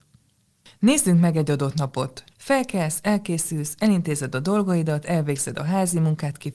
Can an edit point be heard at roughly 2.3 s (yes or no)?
yes